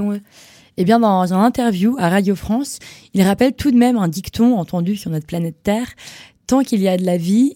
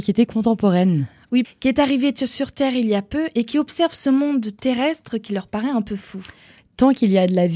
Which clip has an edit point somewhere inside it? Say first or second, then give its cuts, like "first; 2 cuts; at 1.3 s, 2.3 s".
second; 2 cuts; at 1.4 s, 6.6 s